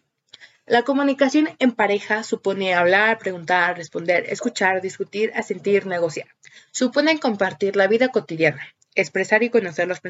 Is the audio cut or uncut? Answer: uncut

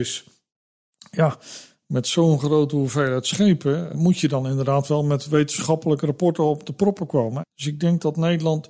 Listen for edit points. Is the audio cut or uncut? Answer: cut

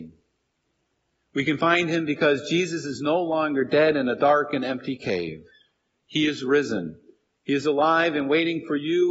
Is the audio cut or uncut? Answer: uncut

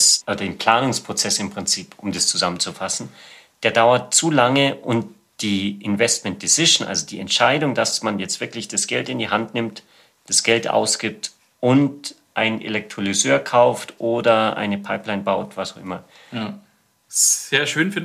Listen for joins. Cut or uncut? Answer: cut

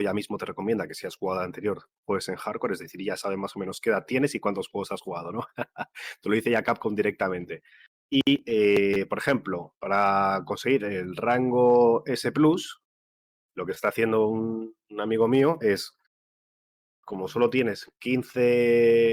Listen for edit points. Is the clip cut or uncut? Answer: uncut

